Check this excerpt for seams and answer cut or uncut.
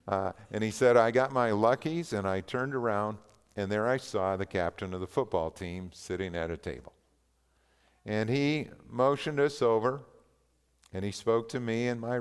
uncut